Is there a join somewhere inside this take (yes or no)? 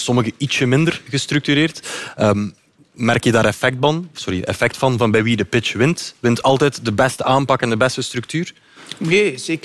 no